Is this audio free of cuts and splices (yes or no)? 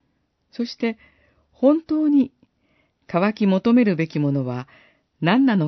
yes